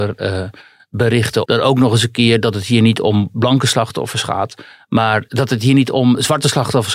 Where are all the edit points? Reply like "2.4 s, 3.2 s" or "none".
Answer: 1.4 s, 5.3 s